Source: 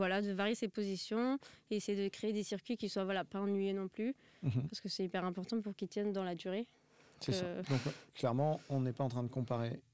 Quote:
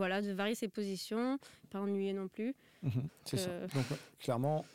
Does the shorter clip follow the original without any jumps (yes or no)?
no